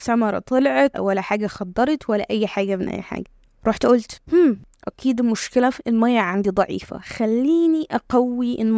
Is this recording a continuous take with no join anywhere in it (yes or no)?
no